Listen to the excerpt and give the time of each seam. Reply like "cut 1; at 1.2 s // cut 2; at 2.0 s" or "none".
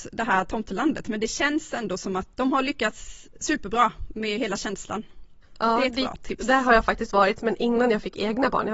cut 1; at 2.3 s

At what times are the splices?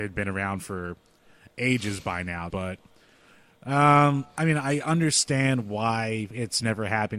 cut 1; at 2.5 s

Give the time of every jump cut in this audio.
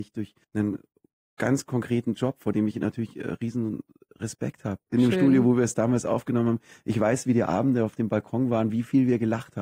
cut 1; at 4.9 s

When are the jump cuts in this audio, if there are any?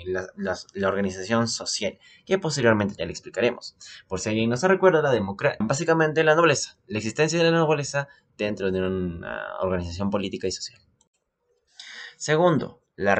cut 1; at 5.6 s

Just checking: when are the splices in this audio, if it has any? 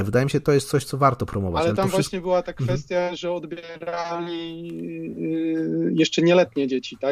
none

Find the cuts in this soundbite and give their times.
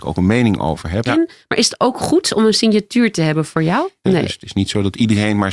cut 1; at 1.1 s // cut 2; at 4.0 s

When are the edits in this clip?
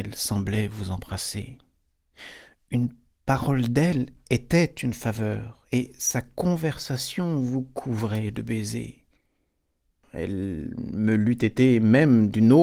cut 1; at 10.0 s

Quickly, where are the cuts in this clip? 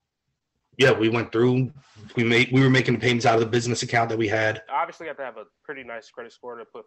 cut 1; at 2.1 s // cut 2; at 4.7 s

